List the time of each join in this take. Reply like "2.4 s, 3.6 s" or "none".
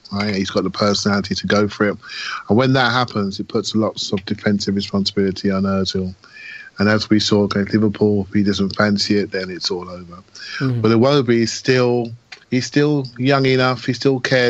12.4 s